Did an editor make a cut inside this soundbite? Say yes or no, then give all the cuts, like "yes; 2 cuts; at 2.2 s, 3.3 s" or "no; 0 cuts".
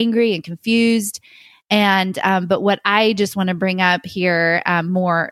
no; 0 cuts